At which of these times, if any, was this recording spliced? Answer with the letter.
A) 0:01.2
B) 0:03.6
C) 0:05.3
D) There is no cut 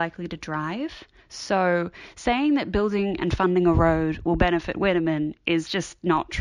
A